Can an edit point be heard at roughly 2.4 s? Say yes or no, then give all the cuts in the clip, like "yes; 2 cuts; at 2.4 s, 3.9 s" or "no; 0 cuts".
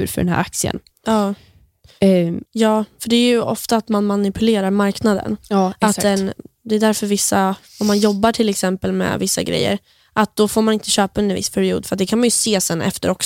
yes; 1 cut; at 2.4 s